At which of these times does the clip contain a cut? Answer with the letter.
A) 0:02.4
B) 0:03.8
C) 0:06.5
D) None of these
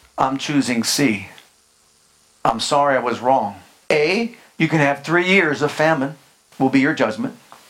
B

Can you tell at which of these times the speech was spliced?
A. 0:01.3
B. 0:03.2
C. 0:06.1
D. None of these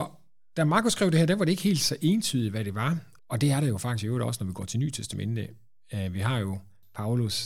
B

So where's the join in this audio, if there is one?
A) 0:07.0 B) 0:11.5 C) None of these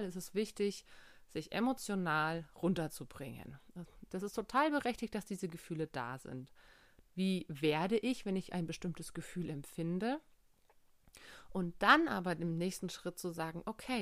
A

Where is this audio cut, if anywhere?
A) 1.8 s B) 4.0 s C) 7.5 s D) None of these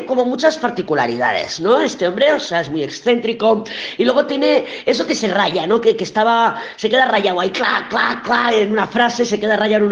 D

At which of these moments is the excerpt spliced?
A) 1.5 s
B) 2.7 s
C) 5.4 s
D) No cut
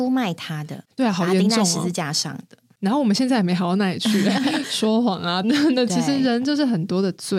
C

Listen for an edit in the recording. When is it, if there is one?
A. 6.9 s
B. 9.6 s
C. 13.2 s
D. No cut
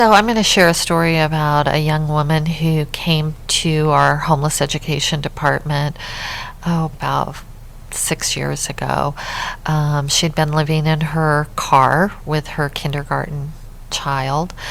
A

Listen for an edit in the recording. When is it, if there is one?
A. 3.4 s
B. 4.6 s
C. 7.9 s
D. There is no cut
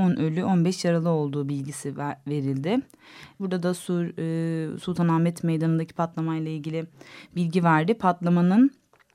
A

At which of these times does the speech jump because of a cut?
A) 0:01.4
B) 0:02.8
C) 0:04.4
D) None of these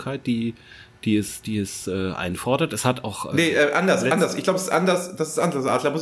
D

